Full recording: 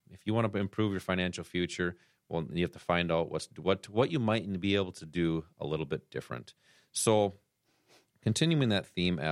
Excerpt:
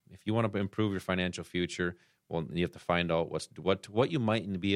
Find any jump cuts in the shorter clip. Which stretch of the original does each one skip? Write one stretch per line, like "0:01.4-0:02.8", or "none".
none